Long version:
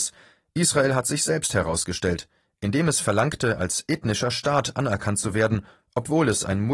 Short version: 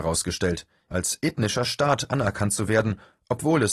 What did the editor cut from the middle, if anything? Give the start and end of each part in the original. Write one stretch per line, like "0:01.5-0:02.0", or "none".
0:02.5-0:03.6